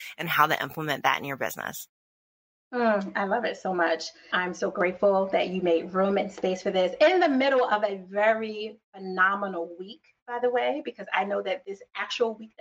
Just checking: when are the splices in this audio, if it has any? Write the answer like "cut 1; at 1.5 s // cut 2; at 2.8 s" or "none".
cut 1; at 4.3 s